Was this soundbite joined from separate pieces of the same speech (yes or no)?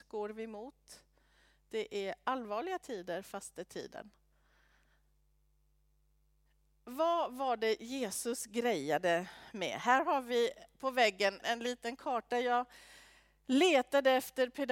yes